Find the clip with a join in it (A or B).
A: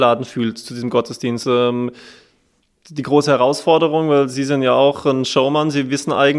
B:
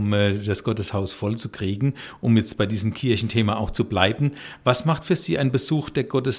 A